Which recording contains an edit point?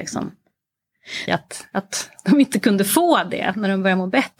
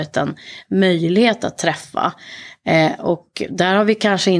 first; 1 cut; at 1.3 s

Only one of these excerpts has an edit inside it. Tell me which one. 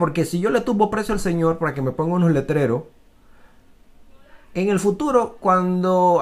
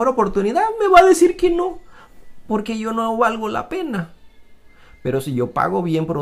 first; 1 cut; at 4.4 s

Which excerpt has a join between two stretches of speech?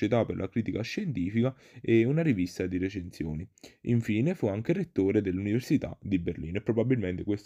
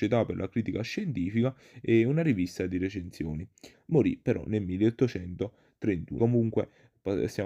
second; 2 cuts; at 3.7 s, 6.2 s

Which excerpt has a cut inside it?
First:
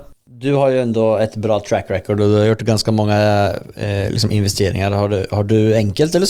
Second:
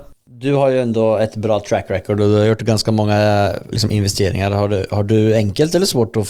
second; 1 cut; at 3.7 s

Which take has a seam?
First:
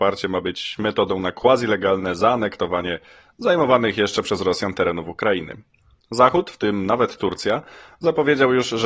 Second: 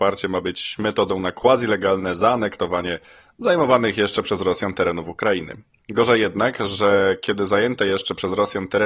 second; 1 cut; at 5.8 s

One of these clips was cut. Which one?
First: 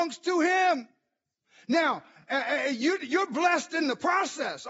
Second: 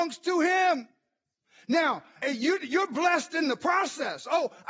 second; 1 cut; at 2.2 s

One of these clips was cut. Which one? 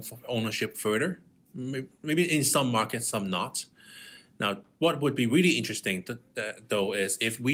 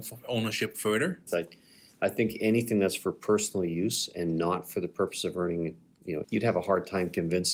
second; 2 cuts; at 1.3 s, 6.2 s

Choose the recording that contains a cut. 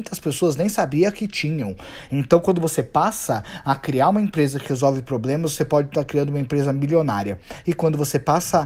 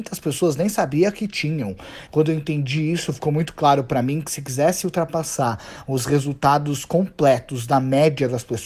second; 1 cut; at 2.1 s

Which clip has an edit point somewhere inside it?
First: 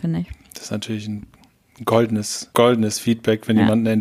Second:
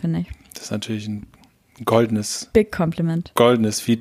first; 1 cut; at 2.5 s

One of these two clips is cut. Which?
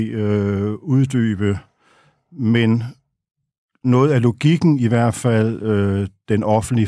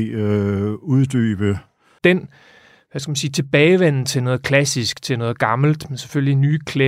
second; 1 cut; at 2.0 s

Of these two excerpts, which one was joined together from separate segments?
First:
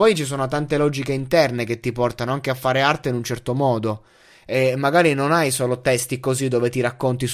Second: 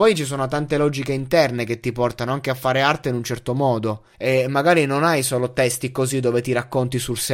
second; 1 cut; at 4.1 s

